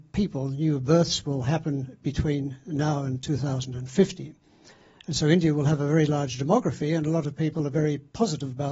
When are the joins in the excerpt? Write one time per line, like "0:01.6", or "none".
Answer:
none